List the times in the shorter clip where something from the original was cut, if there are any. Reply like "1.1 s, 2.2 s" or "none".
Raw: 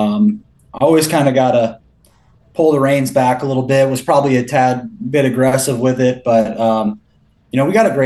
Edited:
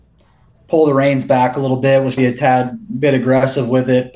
2.2 s